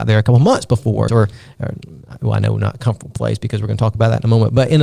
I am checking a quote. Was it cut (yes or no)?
yes